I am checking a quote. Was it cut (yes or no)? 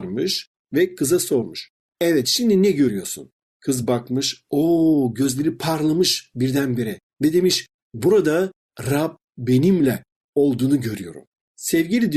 no